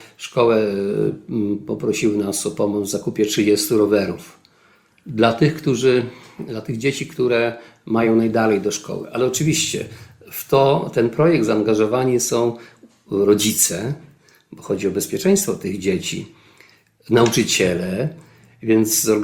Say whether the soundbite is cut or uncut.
uncut